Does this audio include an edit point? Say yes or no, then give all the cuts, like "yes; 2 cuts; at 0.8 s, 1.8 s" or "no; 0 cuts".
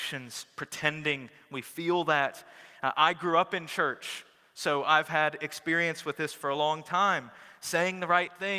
no; 0 cuts